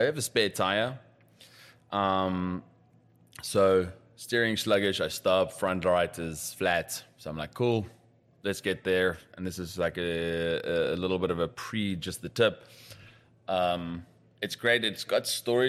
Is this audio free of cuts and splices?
yes; 0 cuts

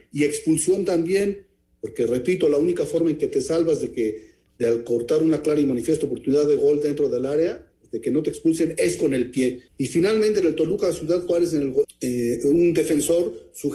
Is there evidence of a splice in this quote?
yes; 2 cuts; at 9.7 s, 11.8 s

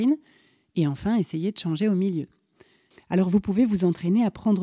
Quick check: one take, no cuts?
no; 1 cut; at 2.9 s

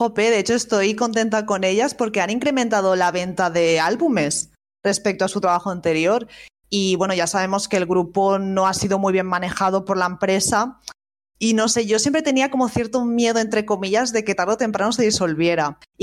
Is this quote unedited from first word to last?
yes; 0 cuts

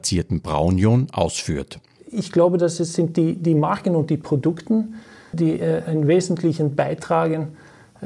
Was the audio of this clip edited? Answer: yes; 1 cut; at 5.3 s

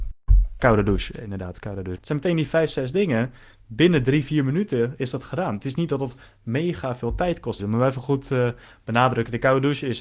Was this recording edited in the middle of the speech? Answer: yes; 2 cuts; at 1.9 s, 7.6 s

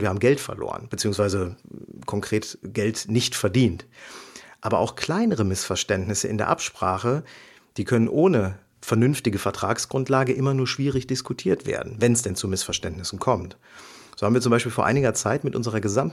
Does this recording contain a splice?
no; 0 cuts

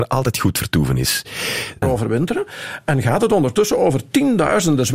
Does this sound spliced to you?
yes; 1 cut; at 1.8 s

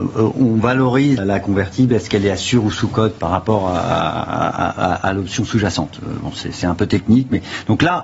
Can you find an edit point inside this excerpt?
yes; 1 cut; at 1.2 s

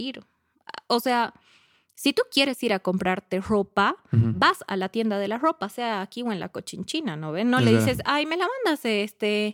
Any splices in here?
no; 0 cuts

